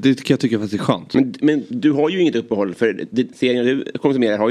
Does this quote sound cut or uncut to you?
uncut